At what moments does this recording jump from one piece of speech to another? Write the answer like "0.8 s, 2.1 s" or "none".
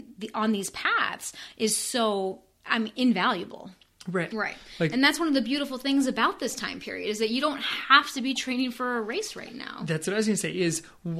4.3 s